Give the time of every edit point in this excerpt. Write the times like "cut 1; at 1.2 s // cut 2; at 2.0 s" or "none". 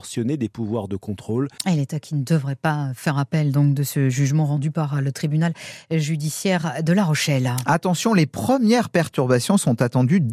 cut 1; at 1.6 s